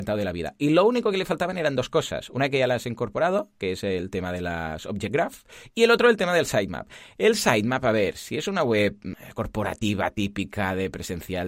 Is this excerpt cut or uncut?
uncut